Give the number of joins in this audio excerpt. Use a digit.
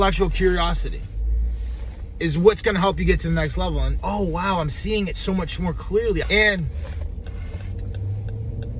2